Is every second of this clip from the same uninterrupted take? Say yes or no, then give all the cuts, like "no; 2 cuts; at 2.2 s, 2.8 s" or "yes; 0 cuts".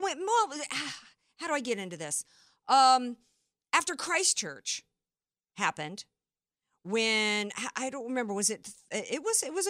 yes; 0 cuts